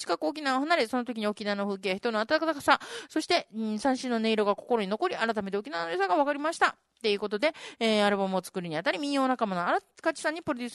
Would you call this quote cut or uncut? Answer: uncut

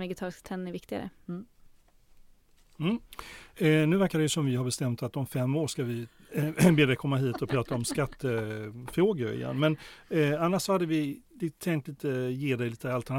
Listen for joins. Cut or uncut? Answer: uncut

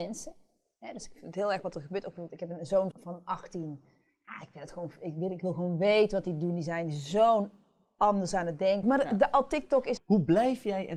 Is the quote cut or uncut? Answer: cut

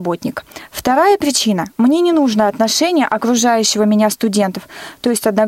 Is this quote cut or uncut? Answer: uncut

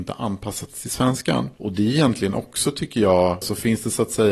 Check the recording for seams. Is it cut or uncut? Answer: cut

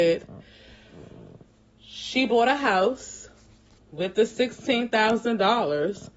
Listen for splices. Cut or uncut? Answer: uncut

